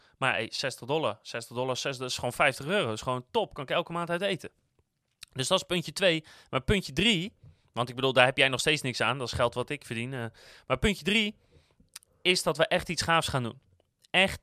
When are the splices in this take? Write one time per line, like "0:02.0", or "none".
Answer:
none